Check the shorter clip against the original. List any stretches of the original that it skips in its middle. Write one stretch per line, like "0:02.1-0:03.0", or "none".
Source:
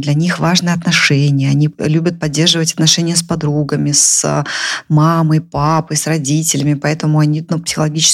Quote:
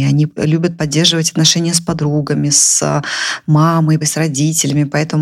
0:05.4-0:05.9